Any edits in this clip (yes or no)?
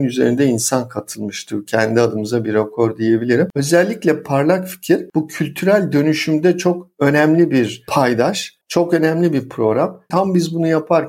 yes